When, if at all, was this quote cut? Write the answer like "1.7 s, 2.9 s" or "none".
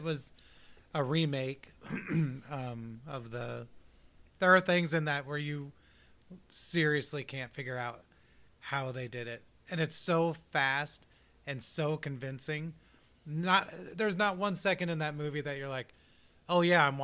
4.3 s